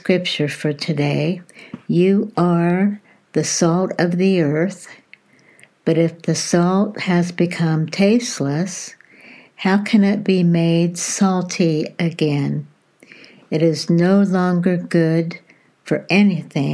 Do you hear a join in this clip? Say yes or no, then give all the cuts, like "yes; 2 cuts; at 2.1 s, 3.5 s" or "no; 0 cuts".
no; 0 cuts